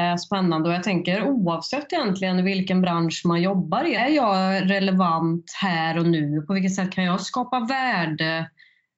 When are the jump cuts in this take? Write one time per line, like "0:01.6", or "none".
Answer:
0:04.0